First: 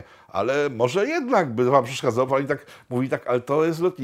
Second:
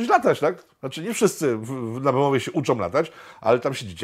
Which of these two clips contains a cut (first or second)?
first